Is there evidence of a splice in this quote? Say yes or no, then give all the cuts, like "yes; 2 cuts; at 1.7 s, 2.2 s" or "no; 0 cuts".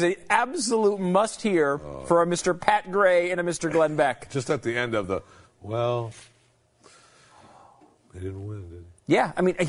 no; 0 cuts